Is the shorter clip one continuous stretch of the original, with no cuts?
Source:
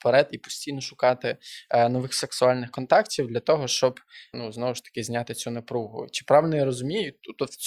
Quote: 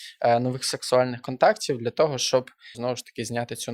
no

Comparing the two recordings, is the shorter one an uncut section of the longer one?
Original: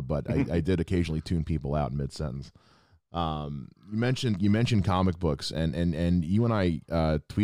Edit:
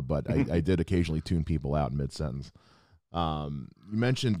yes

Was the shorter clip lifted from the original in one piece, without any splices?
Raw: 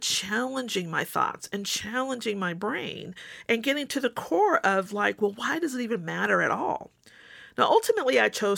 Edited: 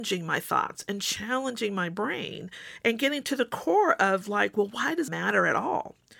no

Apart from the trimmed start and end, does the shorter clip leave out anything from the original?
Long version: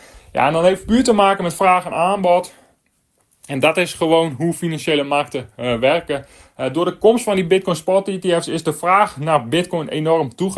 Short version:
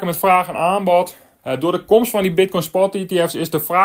yes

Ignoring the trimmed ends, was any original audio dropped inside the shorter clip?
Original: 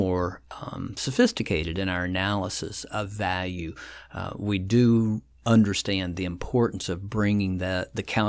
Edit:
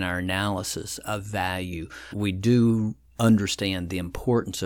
yes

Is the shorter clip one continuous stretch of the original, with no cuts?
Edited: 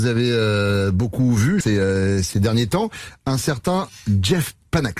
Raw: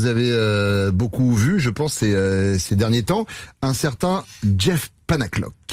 no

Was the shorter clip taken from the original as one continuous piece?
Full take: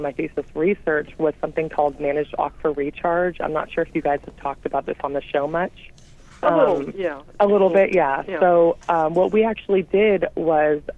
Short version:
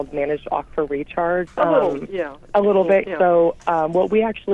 no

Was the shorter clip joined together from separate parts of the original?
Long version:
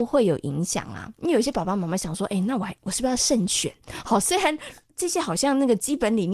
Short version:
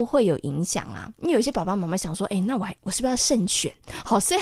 no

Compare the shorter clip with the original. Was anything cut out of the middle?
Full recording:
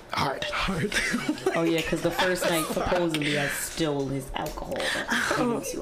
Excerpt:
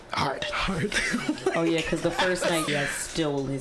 yes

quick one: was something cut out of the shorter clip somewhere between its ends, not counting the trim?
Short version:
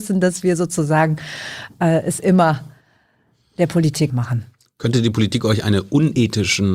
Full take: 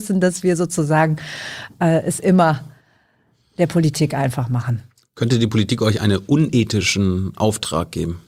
yes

